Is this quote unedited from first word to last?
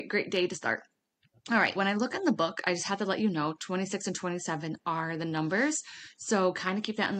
no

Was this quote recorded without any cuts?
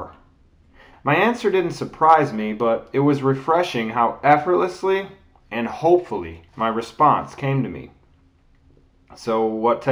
no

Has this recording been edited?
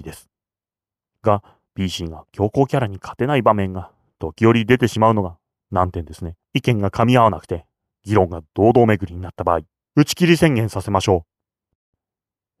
yes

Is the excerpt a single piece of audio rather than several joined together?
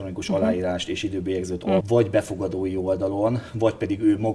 no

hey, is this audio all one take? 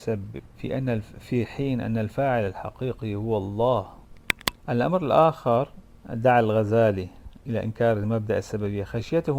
no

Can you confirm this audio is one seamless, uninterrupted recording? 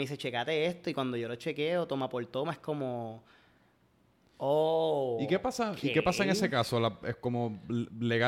yes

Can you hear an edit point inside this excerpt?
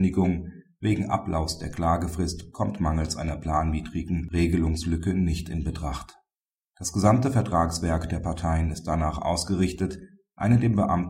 yes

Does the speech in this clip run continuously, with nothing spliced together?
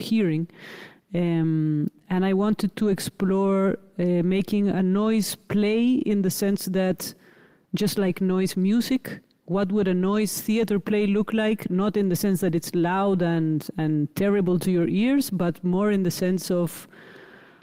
yes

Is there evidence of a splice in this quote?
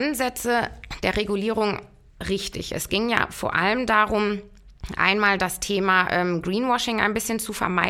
no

